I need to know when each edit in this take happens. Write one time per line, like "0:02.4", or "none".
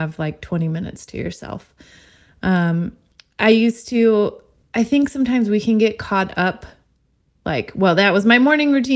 none